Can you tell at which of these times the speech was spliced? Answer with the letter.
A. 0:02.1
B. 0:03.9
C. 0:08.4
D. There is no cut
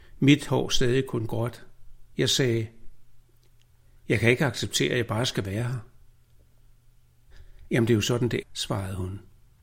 C